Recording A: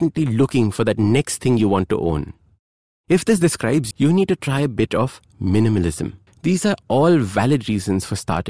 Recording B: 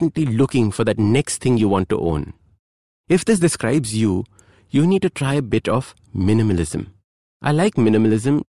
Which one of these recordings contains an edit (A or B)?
A